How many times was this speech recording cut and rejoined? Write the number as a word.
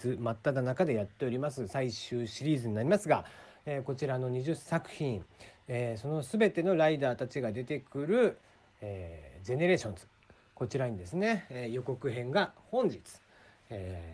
zero